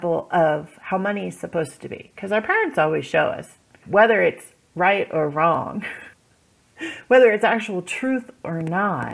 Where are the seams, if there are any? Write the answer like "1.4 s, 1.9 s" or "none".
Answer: 3.8 s, 6.1 s